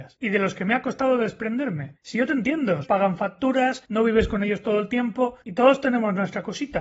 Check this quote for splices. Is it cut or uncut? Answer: cut